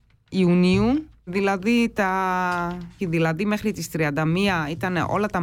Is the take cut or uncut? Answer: cut